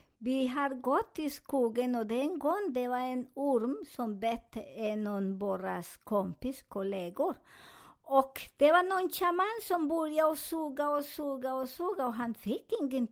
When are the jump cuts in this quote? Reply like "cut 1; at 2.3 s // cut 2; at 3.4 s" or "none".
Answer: none

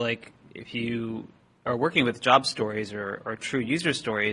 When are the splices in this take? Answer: none

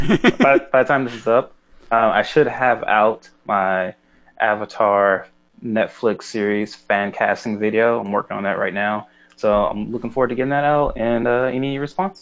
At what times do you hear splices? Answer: none

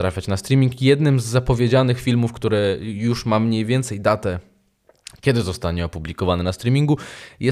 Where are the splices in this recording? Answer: none

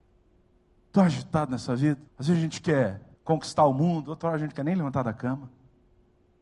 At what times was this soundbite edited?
cut 1; at 2.1 s // cut 2; at 3.2 s

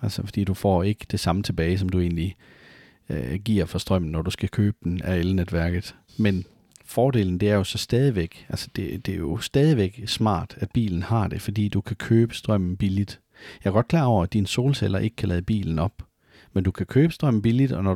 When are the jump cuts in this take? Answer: cut 1; at 6.1 s

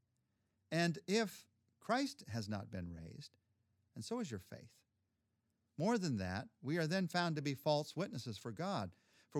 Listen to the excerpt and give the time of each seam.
cut 1; at 3.9 s

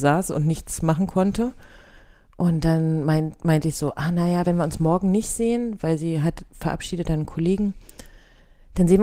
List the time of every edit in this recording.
none

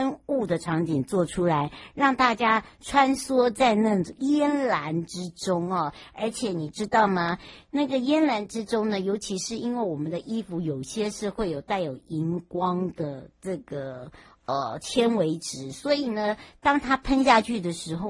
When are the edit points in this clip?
none

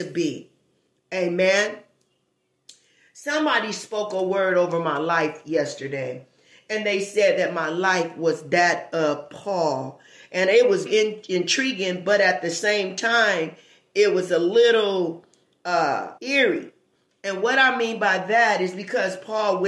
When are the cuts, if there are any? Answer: cut 1; at 10.9 s // cut 2; at 16.2 s

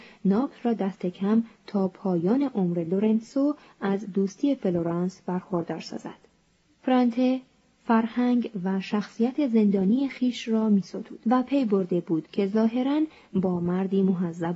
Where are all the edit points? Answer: cut 1; at 6.6 s // cut 2; at 11.2 s

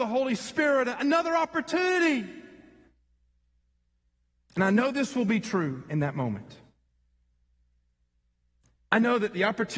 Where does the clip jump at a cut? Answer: none

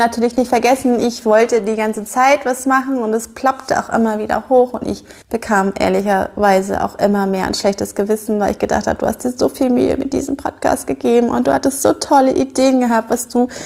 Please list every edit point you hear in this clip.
cut 1; at 5.2 s

